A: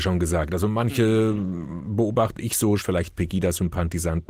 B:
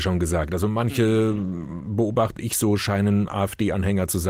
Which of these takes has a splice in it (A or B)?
A